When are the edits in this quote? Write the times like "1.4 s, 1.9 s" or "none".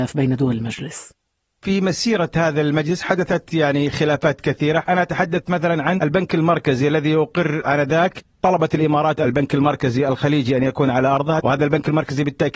11.4 s